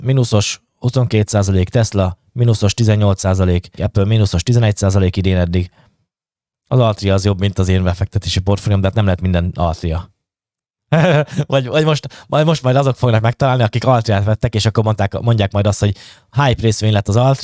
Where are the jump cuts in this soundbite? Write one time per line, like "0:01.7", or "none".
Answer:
0:03.8

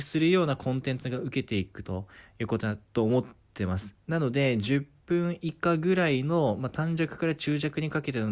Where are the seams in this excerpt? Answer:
none

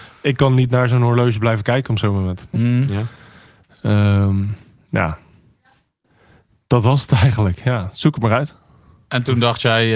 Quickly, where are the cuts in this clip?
0:02.5

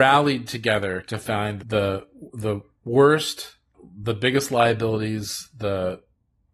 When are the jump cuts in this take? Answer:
0:01.6

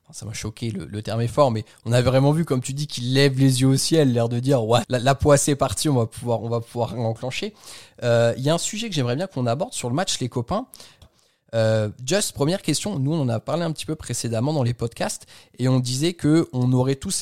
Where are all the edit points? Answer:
0:04.8
0:11.0

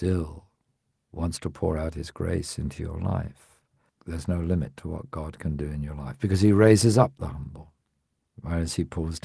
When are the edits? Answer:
0:03.9

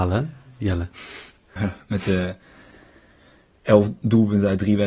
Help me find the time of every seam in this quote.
0:01.6

